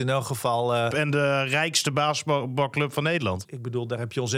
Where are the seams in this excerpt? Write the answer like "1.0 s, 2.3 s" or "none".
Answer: 0.9 s, 3.4 s